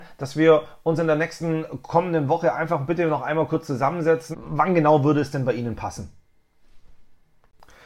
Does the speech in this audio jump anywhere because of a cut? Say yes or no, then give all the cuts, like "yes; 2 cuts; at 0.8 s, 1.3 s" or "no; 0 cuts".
yes; 1 cut; at 4.3 s